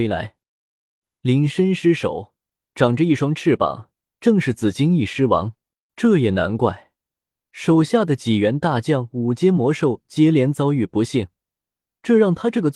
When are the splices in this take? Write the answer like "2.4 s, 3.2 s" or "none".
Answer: 5.9 s

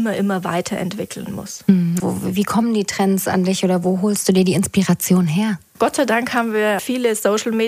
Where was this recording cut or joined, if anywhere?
2.0 s

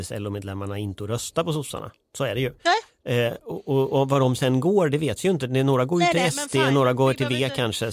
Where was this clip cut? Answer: none

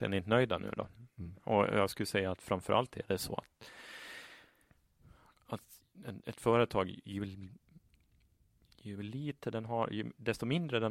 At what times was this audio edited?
none

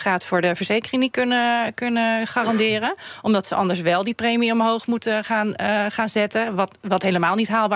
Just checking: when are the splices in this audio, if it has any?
none

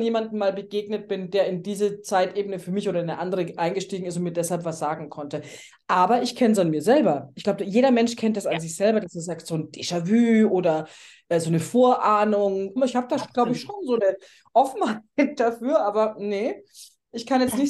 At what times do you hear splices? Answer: 12.8 s

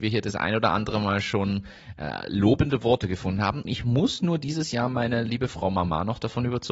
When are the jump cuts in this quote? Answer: 3.7 s

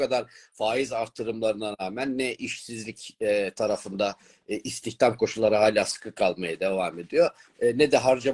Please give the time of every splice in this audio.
none

